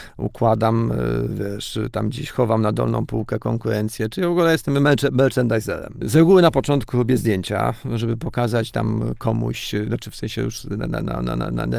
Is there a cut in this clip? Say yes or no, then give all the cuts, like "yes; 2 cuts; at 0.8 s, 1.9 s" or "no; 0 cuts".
yes; 1 cut; at 6.0 s